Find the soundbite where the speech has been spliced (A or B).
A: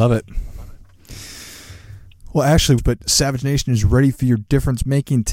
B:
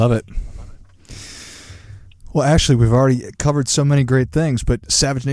A